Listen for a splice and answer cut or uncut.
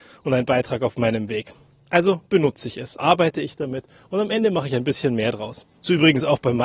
cut